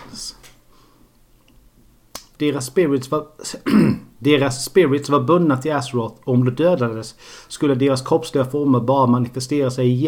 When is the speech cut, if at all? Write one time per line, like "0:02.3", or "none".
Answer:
0:02.3